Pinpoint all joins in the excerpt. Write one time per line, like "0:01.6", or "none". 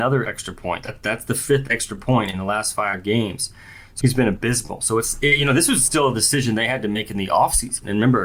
0:04.0